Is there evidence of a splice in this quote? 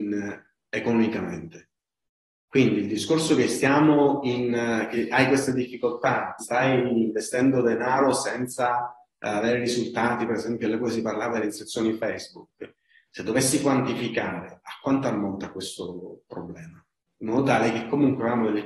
yes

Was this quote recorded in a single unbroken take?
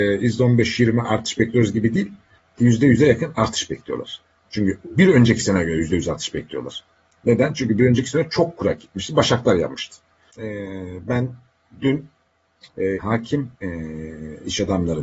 no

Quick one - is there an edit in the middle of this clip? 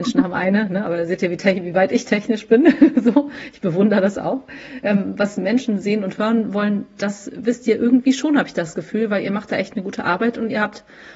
no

